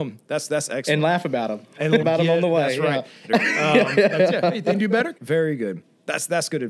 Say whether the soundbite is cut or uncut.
cut